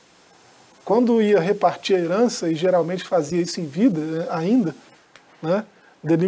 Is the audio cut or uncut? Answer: uncut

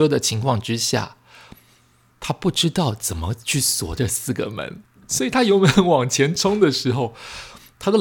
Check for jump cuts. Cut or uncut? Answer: uncut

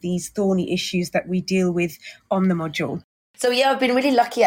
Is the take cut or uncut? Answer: uncut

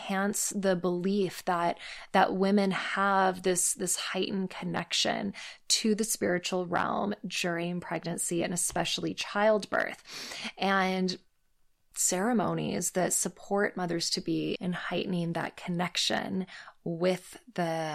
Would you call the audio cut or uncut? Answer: cut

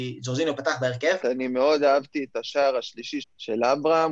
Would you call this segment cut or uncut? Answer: cut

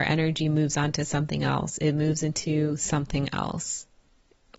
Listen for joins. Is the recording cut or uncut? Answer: uncut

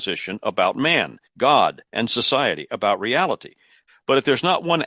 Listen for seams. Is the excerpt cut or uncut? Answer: cut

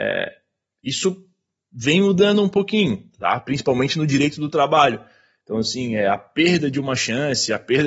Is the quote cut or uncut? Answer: uncut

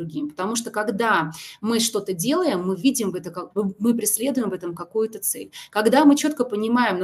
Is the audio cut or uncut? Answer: cut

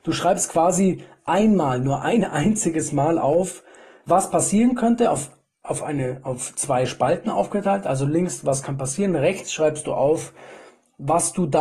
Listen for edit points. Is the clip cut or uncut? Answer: uncut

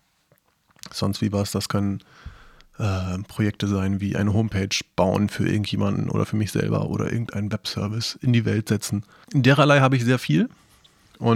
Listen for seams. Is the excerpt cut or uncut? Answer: cut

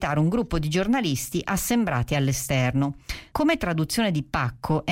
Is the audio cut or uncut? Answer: cut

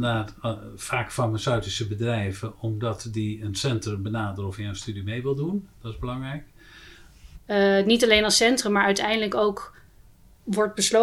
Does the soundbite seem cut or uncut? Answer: cut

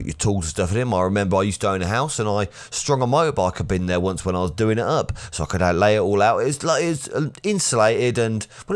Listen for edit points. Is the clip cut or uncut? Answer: uncut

